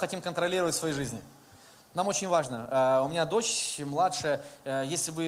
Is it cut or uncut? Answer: uncut